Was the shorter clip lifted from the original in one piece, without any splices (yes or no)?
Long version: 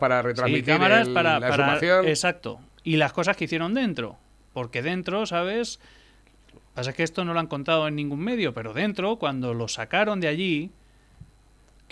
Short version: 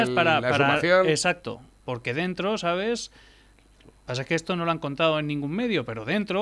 no